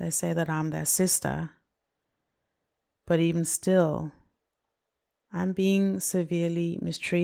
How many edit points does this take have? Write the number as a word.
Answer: zero